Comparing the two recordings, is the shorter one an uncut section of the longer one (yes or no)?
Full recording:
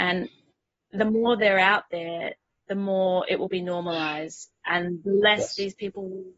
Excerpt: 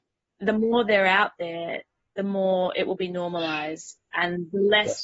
yes